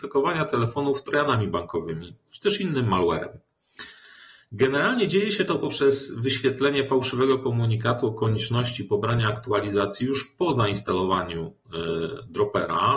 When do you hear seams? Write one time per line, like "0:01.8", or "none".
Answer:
none